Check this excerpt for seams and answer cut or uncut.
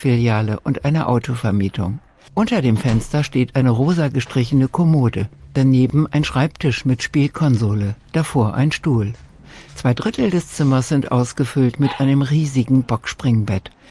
cut